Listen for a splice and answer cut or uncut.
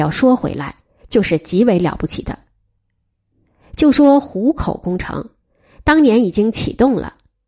cut